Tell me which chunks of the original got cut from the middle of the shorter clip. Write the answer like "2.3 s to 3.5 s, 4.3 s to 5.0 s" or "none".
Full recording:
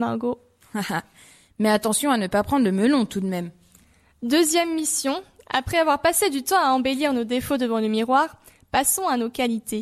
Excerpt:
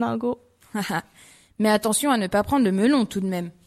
none